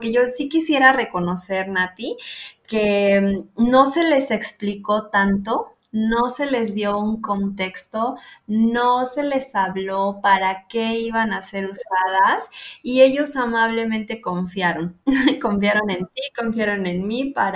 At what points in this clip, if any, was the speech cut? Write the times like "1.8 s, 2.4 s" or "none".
none